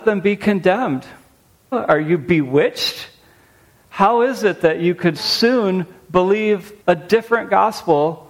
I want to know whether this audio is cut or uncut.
cut